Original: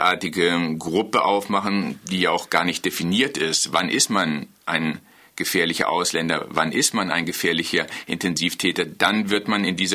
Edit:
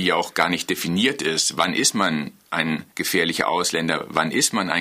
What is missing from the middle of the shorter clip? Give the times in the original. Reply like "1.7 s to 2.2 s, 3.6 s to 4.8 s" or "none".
5.1 s to 5.3 s